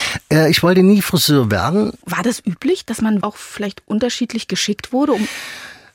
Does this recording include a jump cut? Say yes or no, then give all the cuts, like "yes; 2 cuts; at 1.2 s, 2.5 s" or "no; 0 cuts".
yes; 2 cuts; at 2.0 s, 3.2 s